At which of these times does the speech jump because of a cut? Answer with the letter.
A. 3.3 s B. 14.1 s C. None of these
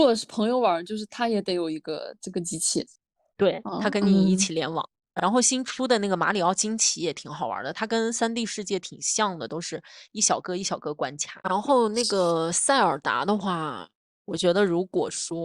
C